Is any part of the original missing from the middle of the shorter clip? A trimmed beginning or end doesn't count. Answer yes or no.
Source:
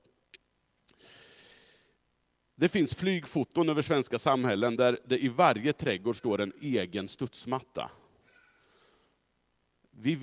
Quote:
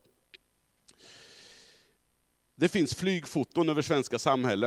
no